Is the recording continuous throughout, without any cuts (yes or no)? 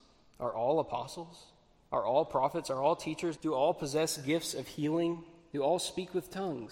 no